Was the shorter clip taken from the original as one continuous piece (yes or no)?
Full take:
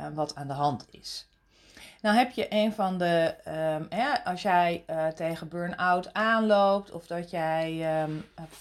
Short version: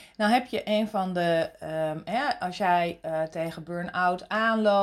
yes